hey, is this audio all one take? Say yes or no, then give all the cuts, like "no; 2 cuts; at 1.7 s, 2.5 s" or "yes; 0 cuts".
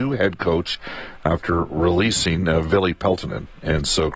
yes; 0 cuts